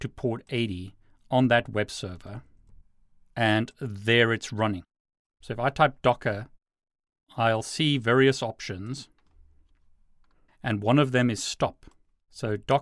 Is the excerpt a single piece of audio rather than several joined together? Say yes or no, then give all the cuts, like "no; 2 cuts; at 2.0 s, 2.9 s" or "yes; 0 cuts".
no; 1 cut; at 5.4 s